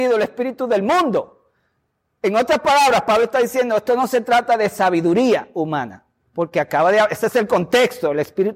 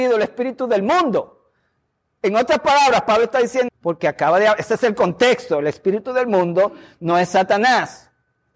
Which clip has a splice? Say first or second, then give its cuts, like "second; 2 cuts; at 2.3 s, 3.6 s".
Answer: second; 1 cut; at 3.7 s